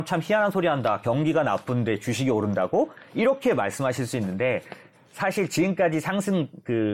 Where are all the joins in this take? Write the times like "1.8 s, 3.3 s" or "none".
none